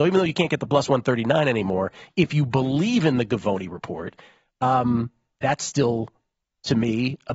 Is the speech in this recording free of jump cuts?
yes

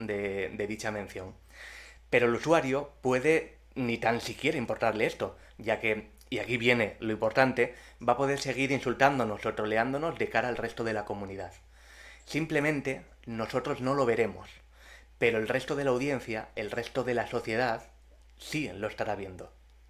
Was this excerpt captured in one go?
yes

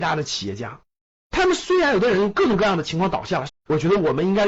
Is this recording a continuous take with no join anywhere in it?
no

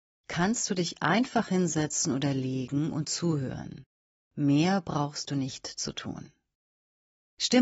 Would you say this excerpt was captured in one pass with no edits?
yes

